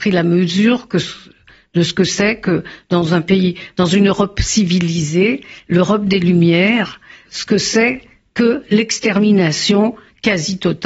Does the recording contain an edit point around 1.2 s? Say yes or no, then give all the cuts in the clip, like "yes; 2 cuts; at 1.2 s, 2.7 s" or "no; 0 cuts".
no; 1 cut; at 7.3 s